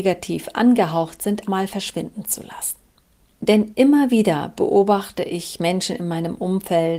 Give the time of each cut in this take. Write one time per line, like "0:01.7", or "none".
0:01.5

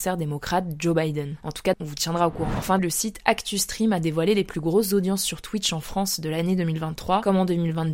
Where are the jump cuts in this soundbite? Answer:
0:01.7
0:02.8

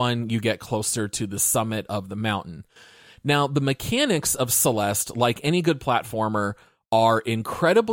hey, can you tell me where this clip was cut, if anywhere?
none

